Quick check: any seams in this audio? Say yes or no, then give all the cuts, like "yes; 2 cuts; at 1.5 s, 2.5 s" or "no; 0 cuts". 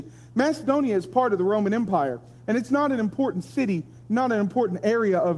no; 0 cuts